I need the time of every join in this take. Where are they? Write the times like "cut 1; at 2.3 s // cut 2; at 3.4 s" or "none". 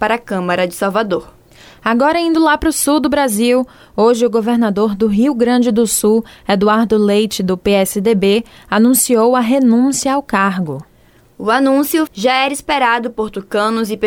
cut 1; at 12.1 s